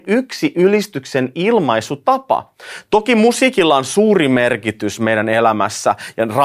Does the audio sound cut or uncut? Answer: uncut